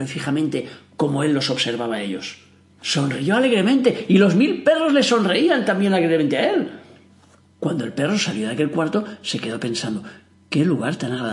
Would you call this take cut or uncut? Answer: cut